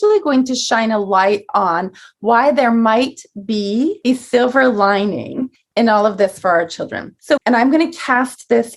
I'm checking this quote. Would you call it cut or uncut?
cut